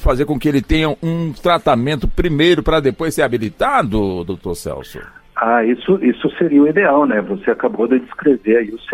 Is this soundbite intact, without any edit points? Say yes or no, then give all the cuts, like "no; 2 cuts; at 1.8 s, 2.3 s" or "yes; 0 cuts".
yes; 0 cuts